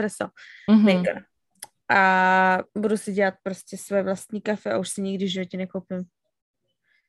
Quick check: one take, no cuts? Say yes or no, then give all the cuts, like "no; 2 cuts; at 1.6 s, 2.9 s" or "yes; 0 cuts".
no; 1 cut; at 2.7 s